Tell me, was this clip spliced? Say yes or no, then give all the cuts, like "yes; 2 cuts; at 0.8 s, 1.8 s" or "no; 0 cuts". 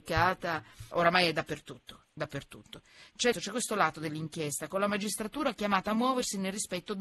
yes; 2 cuts; at 0.9 s, 3.3 s